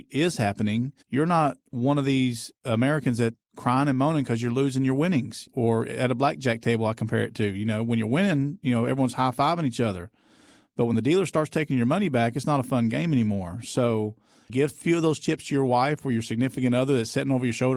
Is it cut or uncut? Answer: cut